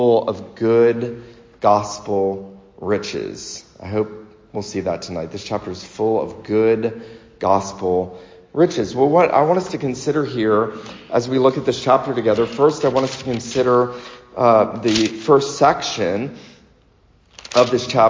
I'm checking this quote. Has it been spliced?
no; 0 cuts

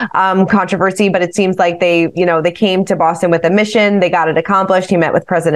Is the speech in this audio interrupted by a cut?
no; 0 cuts

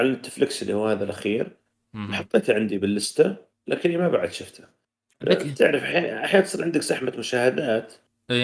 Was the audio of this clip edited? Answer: no; 0 cuts

